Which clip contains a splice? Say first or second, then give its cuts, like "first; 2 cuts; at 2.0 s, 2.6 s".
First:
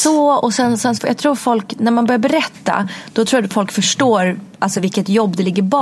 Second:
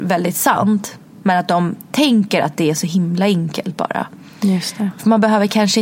first; 1 cut; at 1.0 s